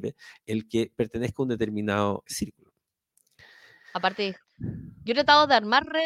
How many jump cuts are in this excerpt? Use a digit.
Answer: 2